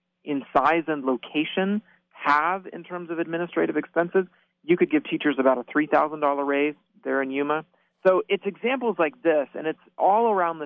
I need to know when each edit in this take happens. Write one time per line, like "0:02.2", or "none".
none